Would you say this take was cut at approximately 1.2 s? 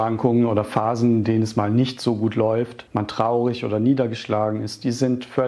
no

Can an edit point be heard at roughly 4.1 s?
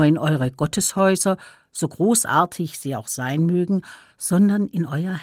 no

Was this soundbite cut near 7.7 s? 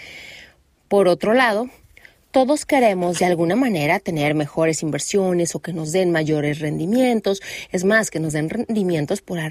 no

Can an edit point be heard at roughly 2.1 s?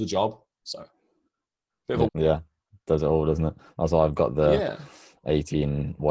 yes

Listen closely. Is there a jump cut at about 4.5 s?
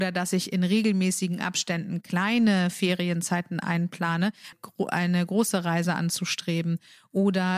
yes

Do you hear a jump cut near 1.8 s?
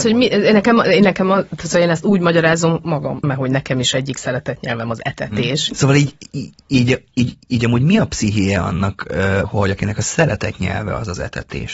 no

